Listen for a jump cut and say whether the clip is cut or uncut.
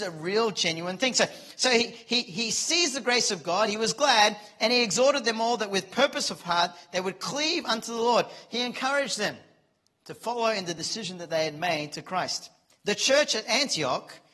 cut